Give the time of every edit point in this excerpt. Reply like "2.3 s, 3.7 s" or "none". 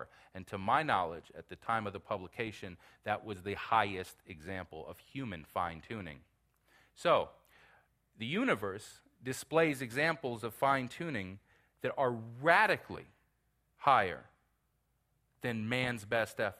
none